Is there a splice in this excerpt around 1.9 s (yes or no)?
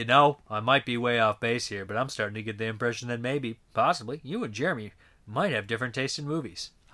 no